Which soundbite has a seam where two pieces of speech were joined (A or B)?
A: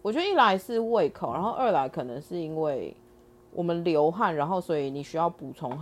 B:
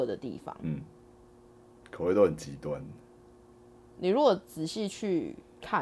B